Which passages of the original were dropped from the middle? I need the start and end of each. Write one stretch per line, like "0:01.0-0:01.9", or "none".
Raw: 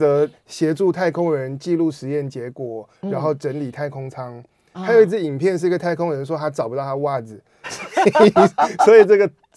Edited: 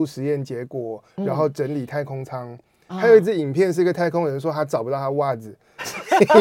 none